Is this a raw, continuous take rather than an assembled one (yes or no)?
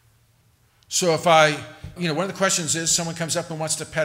no